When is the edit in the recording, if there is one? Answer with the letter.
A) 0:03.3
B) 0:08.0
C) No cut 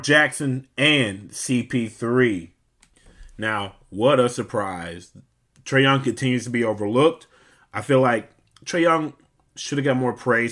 C